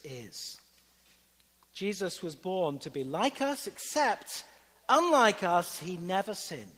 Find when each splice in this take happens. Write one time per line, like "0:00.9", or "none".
none